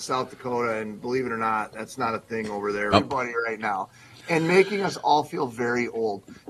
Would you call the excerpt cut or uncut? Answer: cut